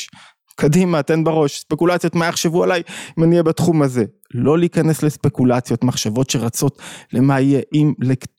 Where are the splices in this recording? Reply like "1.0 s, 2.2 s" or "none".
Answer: none

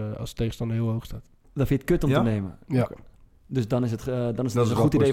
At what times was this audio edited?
none

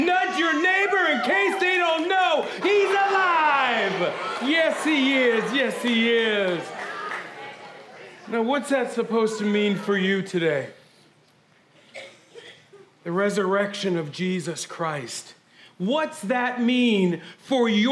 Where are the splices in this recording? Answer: 2.6 s

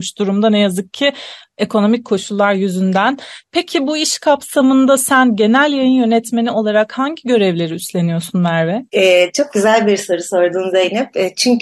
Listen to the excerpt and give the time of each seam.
none

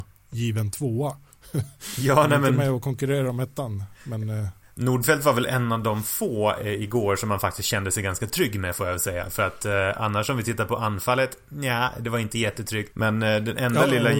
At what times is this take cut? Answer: 12.9 s

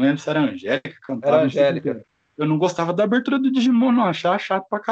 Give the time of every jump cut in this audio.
none

